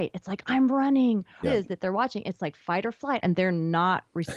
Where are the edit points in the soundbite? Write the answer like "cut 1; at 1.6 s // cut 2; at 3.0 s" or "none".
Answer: cut 1; at 1.4 s // cut 2; at 3.2 s